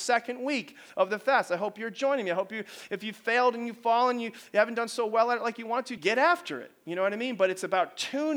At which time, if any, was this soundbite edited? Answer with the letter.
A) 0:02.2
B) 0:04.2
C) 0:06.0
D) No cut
C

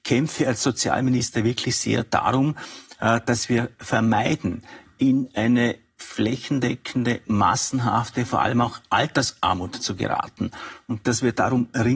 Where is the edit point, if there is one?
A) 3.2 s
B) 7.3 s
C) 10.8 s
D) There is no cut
D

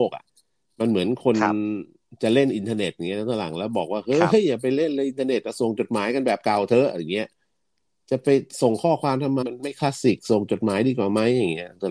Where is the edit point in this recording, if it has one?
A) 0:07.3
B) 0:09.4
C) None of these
B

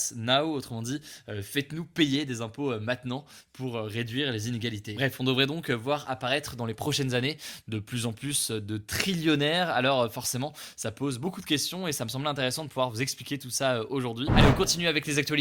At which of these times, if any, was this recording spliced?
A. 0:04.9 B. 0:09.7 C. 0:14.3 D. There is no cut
C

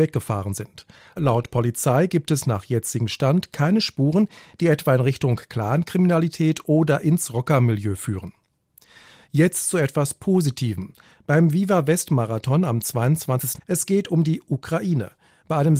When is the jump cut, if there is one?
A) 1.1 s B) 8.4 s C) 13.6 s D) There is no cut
C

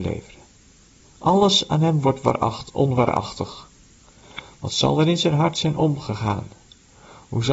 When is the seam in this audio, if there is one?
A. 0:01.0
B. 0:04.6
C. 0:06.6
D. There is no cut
A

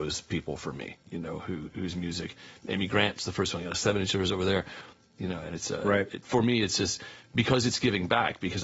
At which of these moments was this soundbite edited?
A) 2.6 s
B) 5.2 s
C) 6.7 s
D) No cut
B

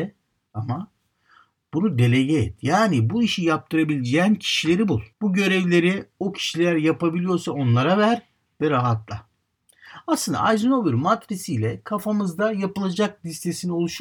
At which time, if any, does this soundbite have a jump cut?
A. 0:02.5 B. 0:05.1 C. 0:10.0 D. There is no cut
B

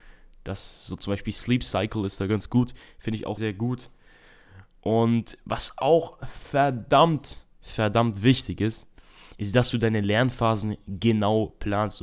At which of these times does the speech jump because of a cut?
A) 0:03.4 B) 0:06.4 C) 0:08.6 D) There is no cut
A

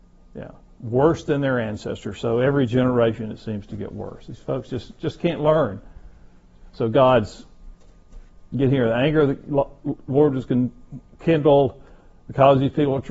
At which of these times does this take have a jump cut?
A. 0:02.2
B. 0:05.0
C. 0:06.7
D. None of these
D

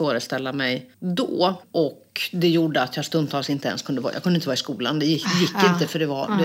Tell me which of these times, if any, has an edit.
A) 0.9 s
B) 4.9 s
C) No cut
A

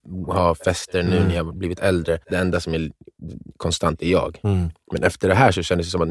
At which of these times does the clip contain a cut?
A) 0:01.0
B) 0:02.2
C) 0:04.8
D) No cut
B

